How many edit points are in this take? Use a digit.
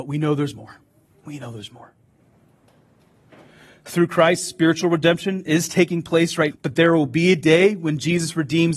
1